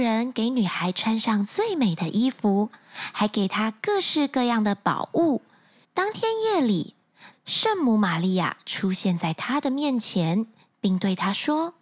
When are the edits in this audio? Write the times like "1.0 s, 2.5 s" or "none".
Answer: 5.8 s, 7.3 s